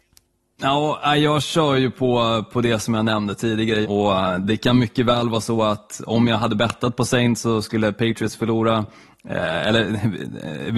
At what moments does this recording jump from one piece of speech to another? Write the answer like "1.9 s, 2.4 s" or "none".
3.8 s